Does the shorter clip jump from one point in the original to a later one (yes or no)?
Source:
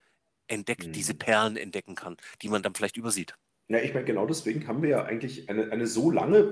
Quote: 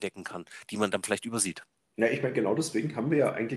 no